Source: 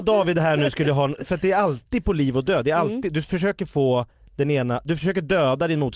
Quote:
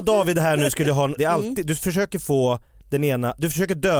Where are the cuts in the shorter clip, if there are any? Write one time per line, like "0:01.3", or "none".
0:01.2